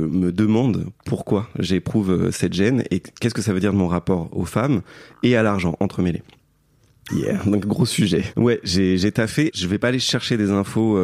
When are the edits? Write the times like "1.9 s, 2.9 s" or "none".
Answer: 7.1 s, 8.3 s, 9.5 s